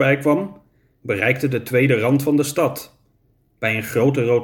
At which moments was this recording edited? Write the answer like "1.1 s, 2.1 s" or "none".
none